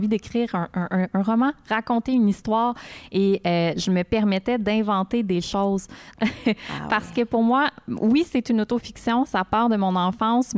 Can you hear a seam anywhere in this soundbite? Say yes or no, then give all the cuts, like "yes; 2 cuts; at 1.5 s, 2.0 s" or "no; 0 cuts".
yes; 1 cut; at 6.1 s